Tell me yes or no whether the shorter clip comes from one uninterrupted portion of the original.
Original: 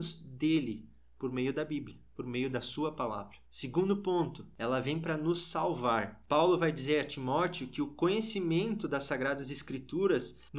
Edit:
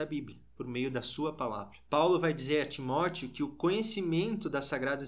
no